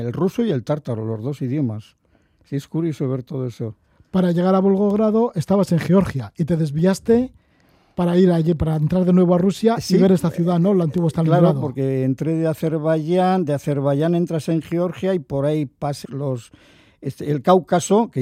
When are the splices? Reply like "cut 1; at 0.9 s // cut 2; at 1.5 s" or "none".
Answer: cut 1; at 16.0 s